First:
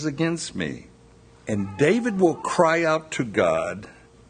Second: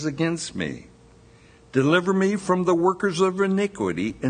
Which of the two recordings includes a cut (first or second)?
first